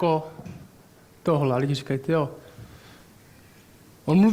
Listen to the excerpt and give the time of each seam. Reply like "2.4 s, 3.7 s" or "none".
none

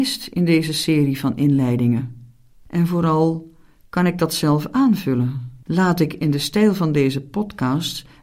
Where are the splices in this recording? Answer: 2.5 s, 5.6 s

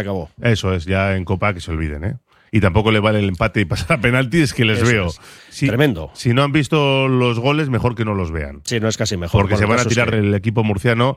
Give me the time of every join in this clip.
5.4 s, 10.1 s

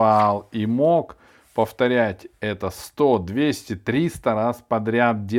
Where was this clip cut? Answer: none

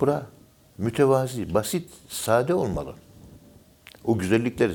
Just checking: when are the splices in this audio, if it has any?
none

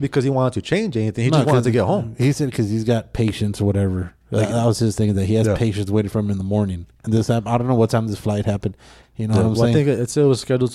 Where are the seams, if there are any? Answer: 7.0 s, 9.0 s

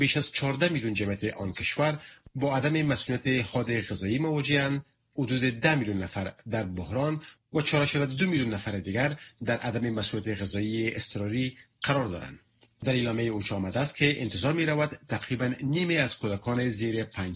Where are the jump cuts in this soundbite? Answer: none

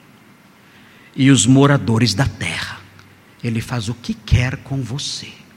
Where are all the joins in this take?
none

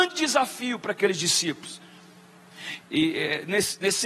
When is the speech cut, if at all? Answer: 2.8 s

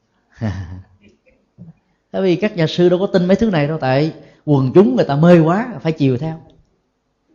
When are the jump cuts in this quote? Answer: none

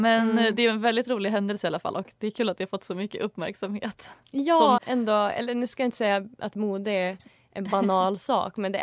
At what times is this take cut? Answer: 4.8 s

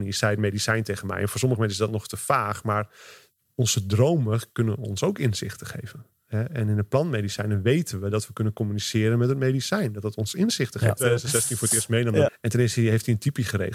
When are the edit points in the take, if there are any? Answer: 11.0 s, 12.3 s

